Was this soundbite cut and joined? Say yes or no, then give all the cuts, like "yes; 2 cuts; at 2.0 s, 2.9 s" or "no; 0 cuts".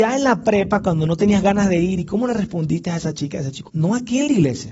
yes; 1 cut; at 3.7 s